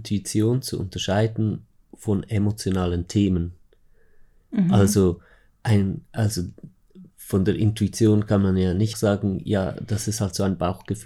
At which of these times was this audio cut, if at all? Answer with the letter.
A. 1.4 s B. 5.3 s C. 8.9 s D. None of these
C